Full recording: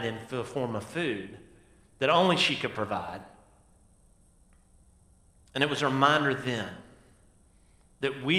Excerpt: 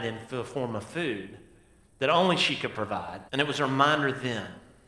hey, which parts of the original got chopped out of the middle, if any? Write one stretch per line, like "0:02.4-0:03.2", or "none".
0:03.3-0:05.5